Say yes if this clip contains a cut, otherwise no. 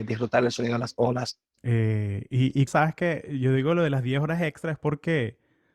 yes